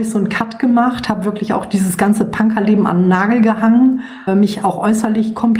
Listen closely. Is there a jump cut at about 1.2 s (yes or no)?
no